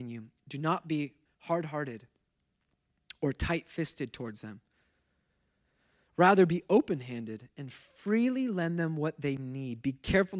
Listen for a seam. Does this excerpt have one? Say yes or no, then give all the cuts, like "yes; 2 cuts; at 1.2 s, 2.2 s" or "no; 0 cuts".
yes; 1 cut; at 1.3 s